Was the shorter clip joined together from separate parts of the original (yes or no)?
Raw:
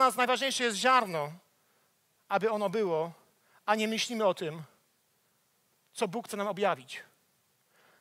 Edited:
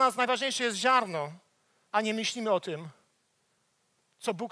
yes